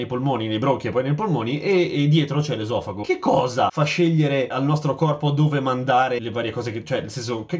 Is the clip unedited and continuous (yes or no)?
yes